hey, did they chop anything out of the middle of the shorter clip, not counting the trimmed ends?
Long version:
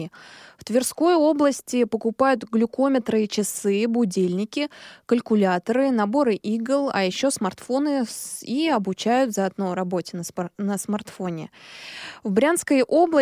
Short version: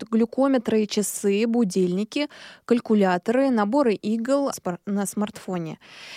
yes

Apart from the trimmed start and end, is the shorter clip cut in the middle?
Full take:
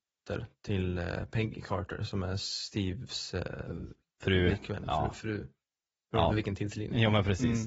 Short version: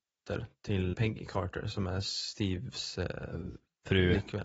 yes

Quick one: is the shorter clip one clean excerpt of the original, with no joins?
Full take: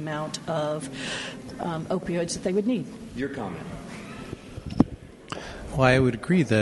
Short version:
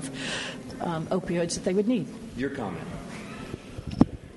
yes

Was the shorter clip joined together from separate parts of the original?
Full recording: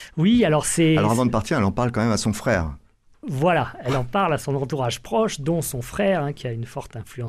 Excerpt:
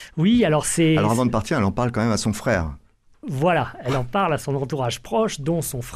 no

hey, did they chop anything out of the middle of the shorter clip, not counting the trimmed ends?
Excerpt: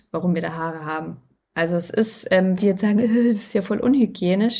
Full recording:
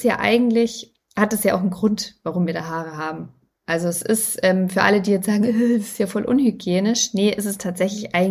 yes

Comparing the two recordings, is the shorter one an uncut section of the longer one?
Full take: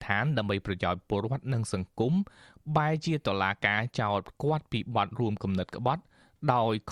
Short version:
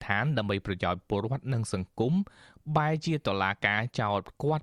yes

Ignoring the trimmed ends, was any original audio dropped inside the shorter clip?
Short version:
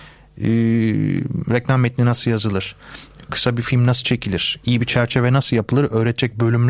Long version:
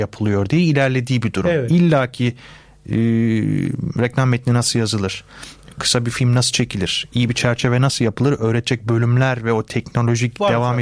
no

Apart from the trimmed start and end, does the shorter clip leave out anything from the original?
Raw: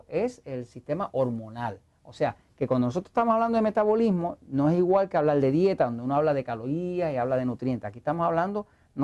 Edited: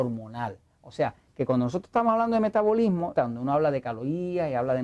yes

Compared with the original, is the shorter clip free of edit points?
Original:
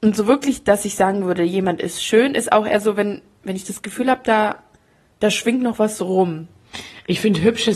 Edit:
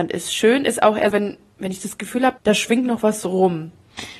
no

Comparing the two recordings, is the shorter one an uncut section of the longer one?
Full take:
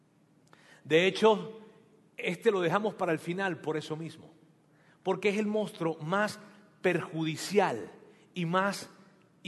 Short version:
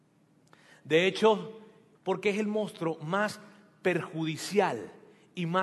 no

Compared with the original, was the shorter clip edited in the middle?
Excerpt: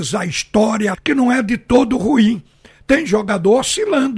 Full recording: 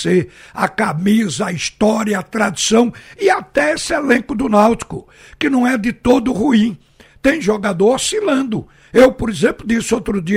yes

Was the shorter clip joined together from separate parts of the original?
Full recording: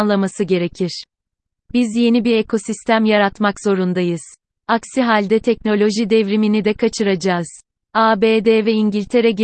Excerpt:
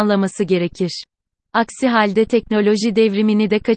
yes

